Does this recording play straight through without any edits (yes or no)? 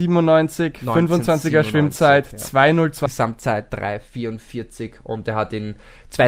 no